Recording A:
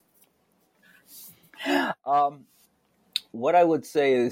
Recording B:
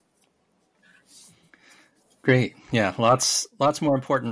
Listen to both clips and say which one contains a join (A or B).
A